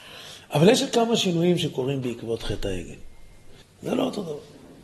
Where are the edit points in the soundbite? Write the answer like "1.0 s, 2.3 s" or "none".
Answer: 3.6 s